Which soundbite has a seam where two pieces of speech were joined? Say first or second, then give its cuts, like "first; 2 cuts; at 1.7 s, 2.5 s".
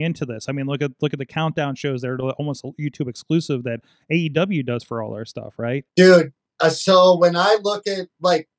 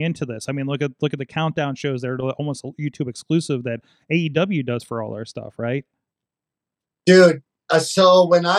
first; 1 cut; at 5.9 s